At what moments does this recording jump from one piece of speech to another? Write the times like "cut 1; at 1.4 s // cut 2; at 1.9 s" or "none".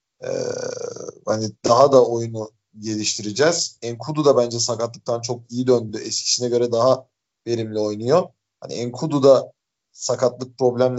none

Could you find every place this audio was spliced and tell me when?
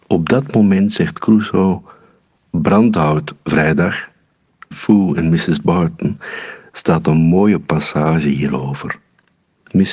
cut 1; at 4.7 s

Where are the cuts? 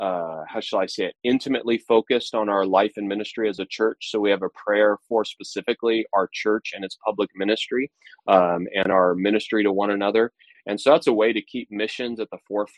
cut 1; at 10.5 s

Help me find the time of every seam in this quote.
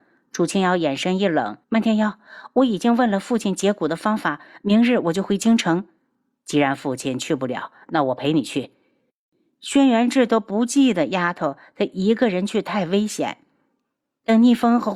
cut 1; at 1.6 s

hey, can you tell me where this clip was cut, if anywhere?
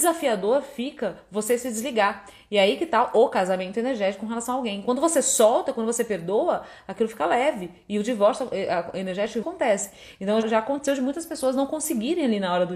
cut 1; at 9.4 s // cut 2; at 10.4 s

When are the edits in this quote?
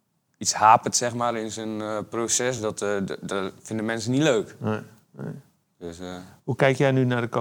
none

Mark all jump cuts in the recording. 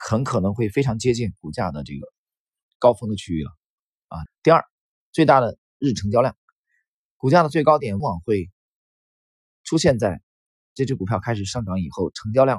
cut 1; at 4.3 s // cut 2; at 8.0 s

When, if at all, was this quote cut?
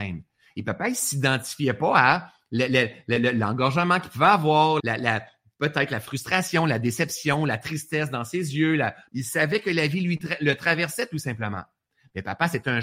cut 1; at 4.8 s // cut 2; at 9.1 s

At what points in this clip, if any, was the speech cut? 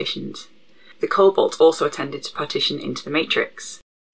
none

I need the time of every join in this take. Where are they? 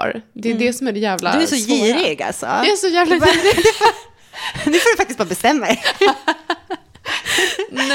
none

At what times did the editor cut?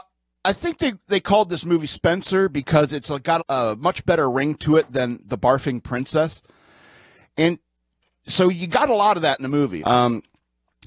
cut 1; at 3.4 s // cut 2; at 9.8 s

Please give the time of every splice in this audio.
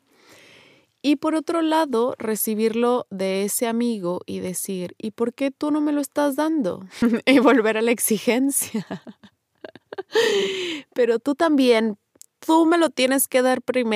none

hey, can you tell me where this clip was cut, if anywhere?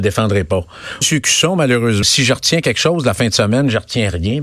cut 1; at 1.0 s // cut 2; at 2.0 s

